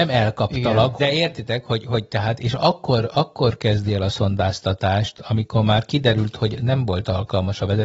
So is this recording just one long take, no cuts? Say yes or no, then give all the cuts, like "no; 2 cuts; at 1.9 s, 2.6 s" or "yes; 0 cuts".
no; 1 cut; at 1.0 s